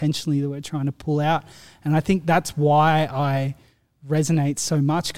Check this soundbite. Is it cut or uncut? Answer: uncut